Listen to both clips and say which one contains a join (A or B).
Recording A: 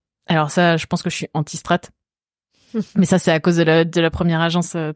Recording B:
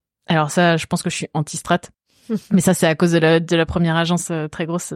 B